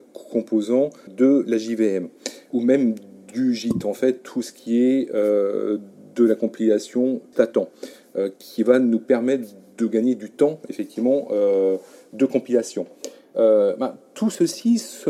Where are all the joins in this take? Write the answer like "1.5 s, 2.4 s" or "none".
1.1 s, 2.5 s, 7.3 s